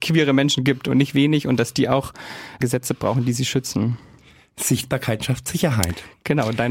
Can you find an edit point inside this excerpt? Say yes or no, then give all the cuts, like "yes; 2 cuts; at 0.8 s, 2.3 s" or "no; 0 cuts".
no; 0 cuts